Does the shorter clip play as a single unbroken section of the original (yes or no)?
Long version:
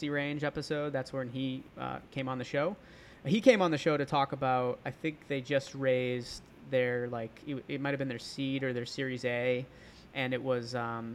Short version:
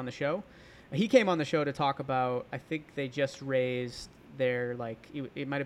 yes